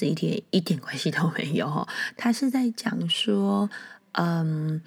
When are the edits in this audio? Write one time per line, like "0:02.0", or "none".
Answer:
none

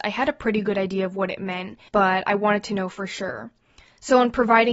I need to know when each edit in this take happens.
none

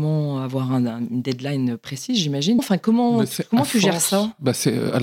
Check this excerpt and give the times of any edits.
0:02.6

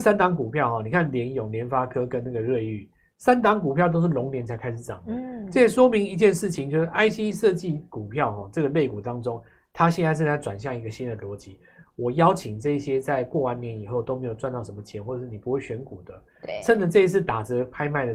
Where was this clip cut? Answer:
0:11.9

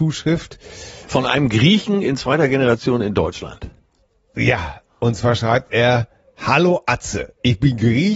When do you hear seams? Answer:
none

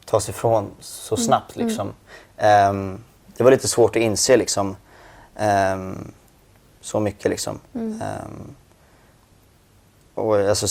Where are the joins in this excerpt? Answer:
none

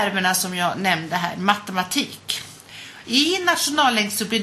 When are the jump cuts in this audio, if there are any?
0:03.0

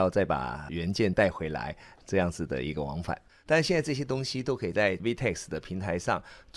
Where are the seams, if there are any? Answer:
0:02.0

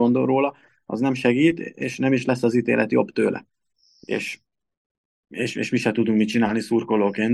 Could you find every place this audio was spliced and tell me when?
none

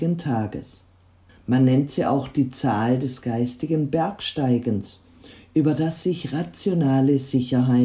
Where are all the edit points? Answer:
0:01.3

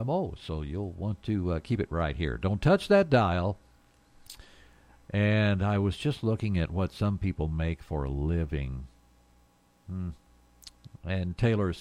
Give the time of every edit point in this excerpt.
none

